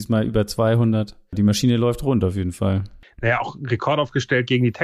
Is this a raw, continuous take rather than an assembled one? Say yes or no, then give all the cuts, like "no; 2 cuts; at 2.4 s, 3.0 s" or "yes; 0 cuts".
yes; 0 cuts